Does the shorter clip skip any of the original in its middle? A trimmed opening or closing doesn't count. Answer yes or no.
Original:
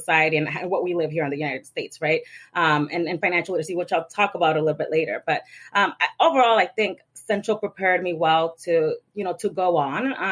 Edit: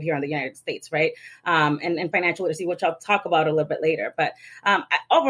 no